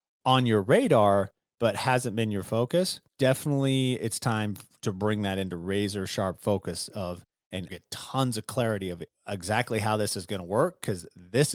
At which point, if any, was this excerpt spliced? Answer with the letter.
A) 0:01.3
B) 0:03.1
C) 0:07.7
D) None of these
C